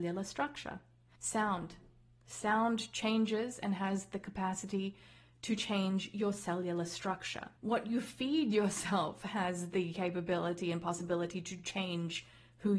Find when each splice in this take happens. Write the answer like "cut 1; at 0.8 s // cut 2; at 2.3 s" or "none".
cut 1; at 1.2 s // cut 2; at 7.6 s